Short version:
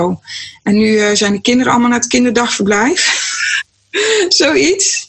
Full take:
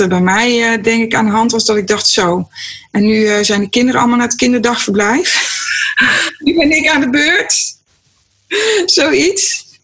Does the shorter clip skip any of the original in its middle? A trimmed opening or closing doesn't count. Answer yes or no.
yes